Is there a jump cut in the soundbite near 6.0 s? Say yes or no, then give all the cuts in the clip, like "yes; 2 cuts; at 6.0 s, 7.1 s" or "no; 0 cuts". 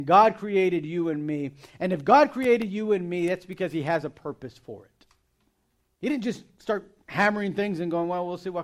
yes; 1 cut; at 6.0 s